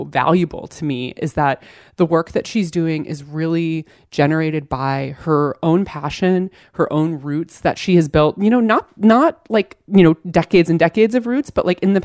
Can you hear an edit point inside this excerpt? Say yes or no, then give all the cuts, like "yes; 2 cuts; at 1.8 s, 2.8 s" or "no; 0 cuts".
no; 0 cuts